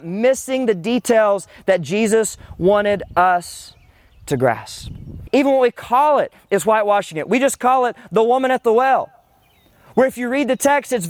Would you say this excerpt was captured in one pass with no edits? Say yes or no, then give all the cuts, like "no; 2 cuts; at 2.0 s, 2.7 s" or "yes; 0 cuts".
no; 1 cut; at 5.3 s